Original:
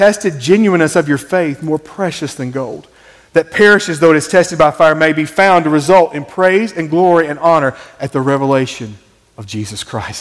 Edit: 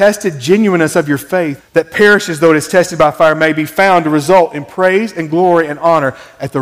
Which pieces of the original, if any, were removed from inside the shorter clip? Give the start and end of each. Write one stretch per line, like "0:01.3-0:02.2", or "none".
0:01.6-0:03.2